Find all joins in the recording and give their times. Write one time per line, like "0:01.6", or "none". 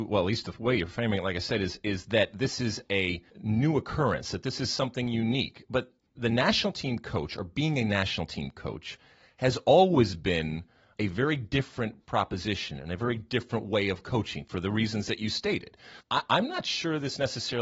0:03.3
0:16.0

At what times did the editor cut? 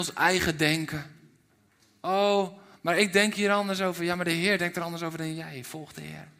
none

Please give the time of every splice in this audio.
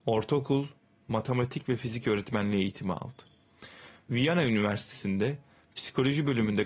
none

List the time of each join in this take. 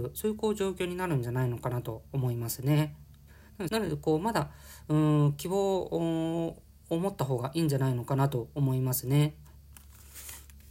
0:03.7

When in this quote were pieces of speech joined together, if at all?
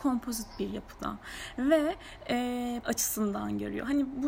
0:02.8

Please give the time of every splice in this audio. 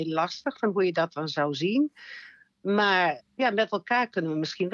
0:03.2

